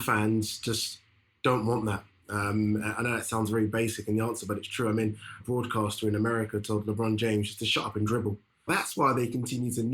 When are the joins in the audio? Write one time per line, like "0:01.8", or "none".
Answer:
0:05.4
0:08.7